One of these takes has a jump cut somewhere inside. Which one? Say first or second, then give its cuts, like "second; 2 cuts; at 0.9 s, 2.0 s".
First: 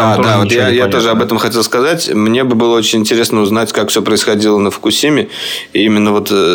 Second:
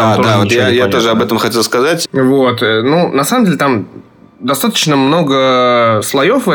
second; 1 cut; at 2.0 s